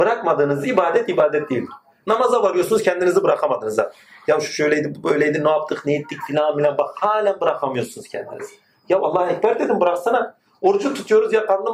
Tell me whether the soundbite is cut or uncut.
uncut